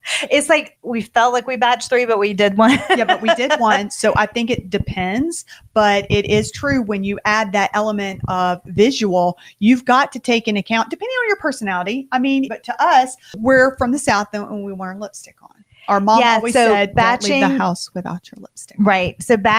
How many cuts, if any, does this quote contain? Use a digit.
1